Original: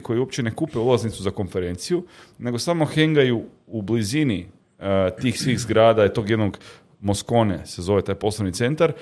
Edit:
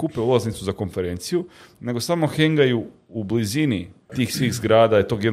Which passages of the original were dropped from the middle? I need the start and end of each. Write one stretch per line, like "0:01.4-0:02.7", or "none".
0:04.7-0:05.2